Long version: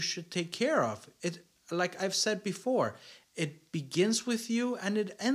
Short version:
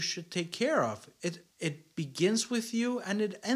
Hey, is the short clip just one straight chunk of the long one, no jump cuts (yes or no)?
no